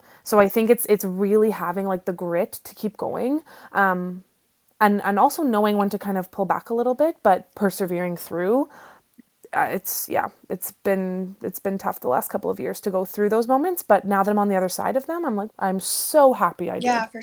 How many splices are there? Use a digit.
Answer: 2